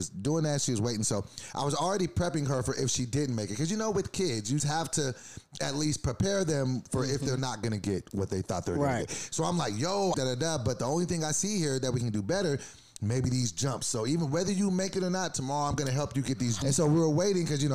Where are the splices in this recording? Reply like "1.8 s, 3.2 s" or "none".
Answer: 4.6 s, 10.1 s, 16.6 s